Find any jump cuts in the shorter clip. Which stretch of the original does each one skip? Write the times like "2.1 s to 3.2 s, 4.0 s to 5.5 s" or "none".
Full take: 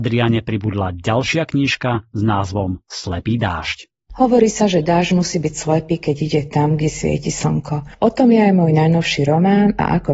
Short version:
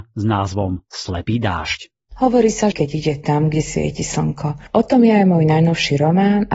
4.7 s to 6.0 s